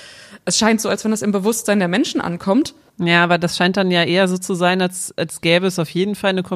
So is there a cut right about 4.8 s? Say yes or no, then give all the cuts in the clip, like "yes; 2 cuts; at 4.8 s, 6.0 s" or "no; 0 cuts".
no; 1 cut; at 2.9 s